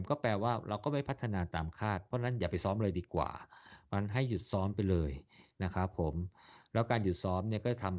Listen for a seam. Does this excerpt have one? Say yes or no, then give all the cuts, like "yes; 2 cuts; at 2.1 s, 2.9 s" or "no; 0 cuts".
no; 0 cuts